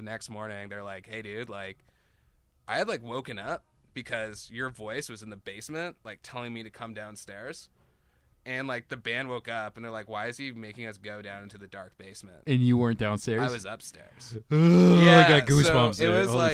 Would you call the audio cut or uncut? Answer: uncut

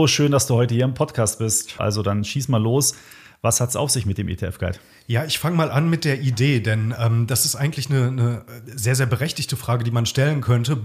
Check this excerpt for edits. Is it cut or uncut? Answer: cut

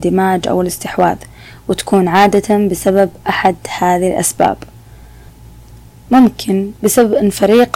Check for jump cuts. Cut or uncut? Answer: uncut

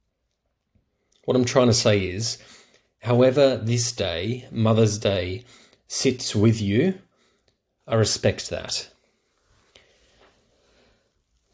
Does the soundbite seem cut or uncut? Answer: uncut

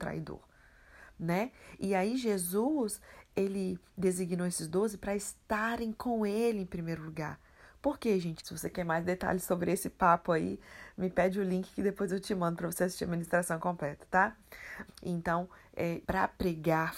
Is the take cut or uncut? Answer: cut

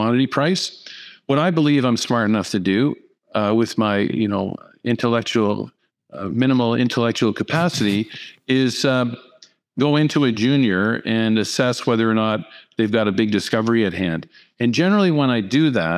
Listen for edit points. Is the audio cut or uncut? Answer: uncut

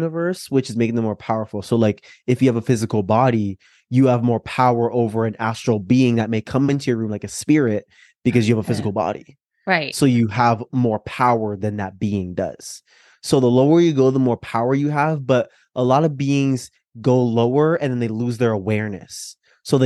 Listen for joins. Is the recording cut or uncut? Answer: uncut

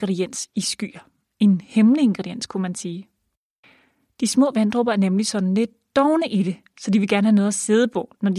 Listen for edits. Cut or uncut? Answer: uncut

